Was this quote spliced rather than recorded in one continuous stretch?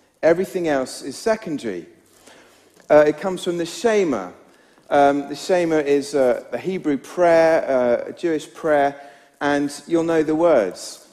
yes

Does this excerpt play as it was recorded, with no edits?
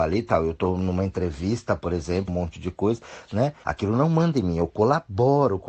no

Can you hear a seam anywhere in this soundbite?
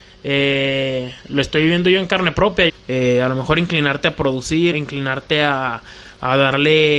yes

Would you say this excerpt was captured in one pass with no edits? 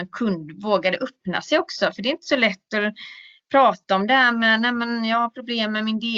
yes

